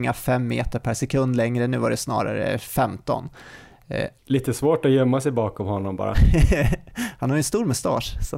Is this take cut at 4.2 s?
yes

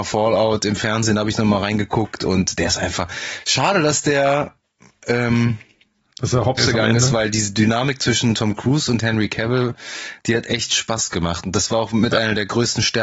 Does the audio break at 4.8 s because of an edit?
no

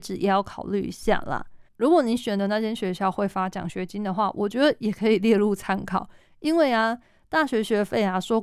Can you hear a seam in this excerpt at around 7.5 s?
no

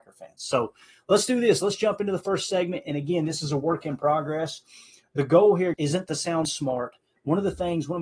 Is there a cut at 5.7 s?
yes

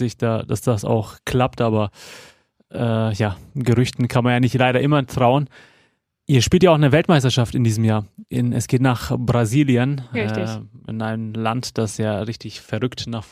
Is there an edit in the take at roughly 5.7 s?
no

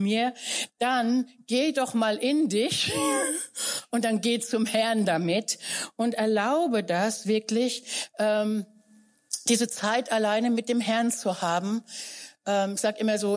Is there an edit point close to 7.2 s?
no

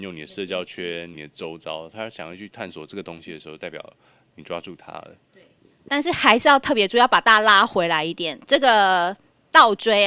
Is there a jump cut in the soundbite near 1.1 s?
yes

